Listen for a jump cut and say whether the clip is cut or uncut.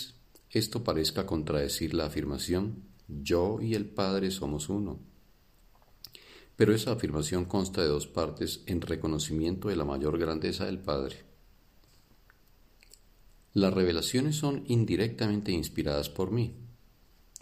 uncut